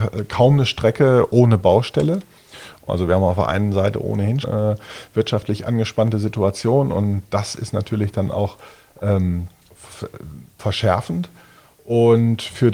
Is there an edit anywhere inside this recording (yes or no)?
yes